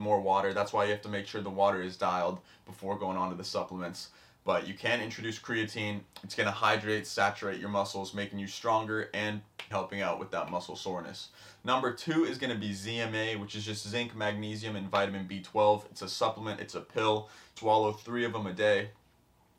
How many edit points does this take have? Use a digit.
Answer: 2